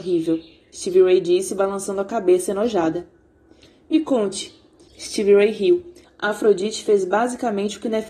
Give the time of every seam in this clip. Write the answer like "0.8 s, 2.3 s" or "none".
4.9 s, 6.0 s